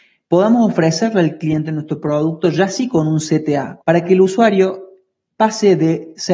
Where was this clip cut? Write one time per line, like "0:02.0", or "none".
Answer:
0:03.8